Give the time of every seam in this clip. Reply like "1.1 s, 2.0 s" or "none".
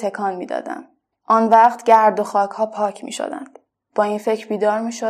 3.9 s